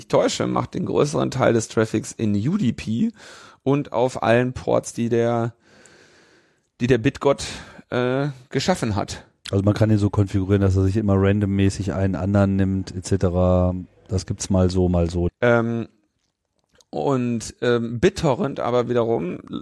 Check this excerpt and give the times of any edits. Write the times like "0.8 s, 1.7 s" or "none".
14.0 s, 15.3 s